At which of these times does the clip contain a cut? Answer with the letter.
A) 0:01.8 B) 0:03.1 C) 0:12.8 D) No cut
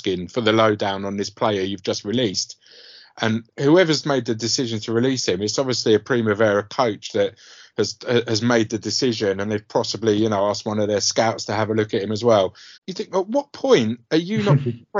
C